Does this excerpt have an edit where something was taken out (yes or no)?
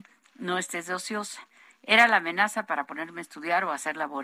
no